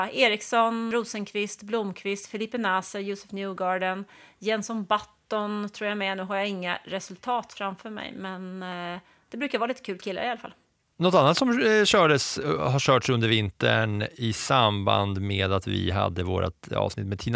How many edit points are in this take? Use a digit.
2